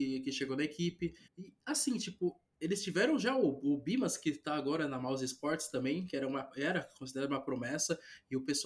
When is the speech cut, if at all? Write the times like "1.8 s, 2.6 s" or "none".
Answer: 1.3 s